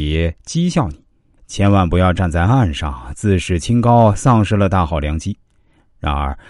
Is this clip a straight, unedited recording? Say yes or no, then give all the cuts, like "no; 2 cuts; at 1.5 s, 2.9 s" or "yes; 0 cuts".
no; 1 cut; at 1.4 s